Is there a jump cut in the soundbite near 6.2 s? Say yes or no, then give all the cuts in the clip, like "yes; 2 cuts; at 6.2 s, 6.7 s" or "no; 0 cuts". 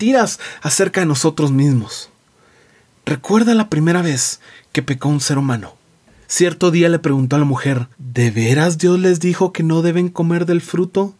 yes; 2 cuts; at 6.2 s, 7.9 s